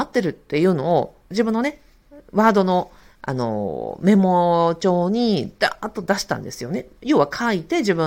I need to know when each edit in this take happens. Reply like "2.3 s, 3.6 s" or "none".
1.3 s